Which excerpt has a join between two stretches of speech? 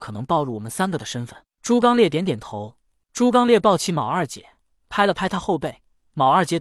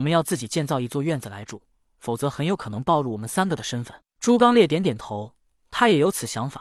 first; 1 cut; at 3.0 s

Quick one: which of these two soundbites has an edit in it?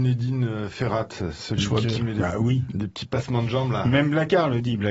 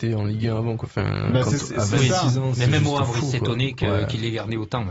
first; 1 cut; at 1.8 s

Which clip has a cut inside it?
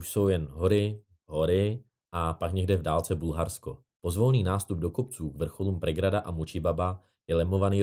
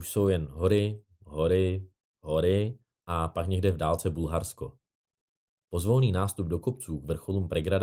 first; 2 cuts; at 1.2 s, 3.9 s

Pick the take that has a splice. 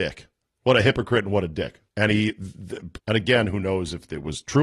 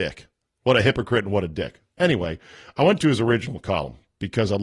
first; 2 cuts; at 1.9 s, 3.0 s

